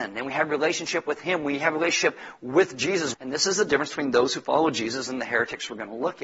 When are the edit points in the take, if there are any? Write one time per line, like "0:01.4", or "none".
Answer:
0:03.1

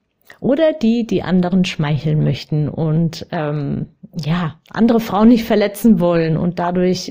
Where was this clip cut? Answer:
none

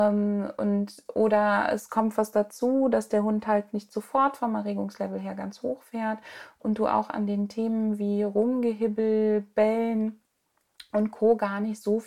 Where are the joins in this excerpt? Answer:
none

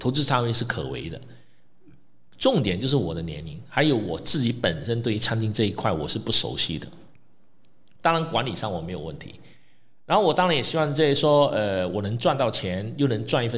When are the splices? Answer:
0:08.0

